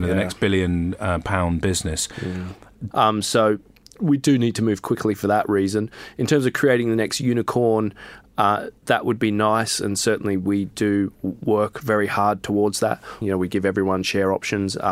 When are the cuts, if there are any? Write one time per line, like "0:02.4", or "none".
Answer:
0:02.9
0:13.2